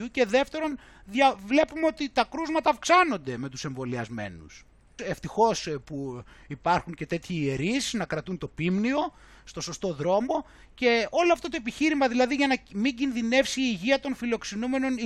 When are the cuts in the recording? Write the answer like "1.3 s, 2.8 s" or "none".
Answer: 5.0 s